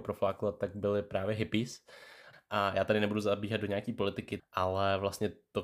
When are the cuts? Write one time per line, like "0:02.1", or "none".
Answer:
0:02.3
0:04.4